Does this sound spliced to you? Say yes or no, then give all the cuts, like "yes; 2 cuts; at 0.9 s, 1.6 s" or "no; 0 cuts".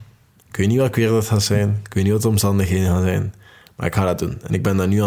no; 0 cuts